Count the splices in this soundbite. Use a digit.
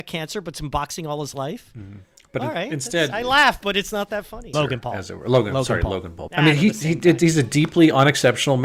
2